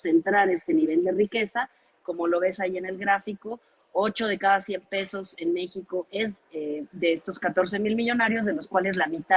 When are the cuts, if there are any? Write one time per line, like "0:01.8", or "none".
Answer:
none